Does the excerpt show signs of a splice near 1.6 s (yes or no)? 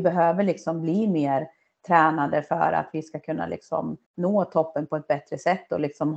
no